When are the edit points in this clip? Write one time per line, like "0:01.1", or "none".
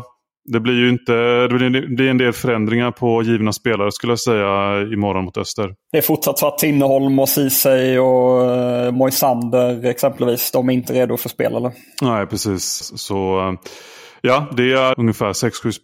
0:12.8
0:14.9